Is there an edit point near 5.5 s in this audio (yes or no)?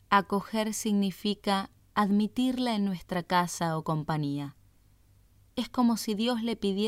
no